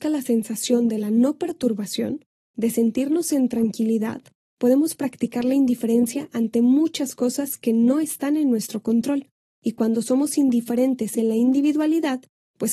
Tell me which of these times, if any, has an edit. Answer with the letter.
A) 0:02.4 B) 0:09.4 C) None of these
C